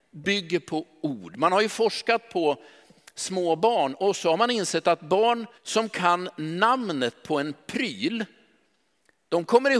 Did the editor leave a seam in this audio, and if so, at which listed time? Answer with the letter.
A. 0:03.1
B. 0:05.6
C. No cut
B